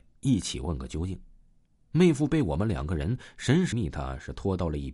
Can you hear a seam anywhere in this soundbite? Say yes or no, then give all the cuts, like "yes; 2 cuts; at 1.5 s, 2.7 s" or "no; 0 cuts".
yes; 1 cut; at 3.7 s